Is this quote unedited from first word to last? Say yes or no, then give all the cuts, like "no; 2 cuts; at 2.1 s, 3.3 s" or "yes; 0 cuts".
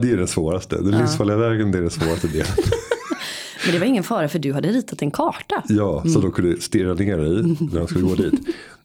yes; 0 cuts